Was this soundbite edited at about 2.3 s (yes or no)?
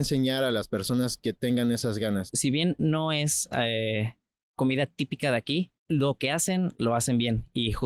yes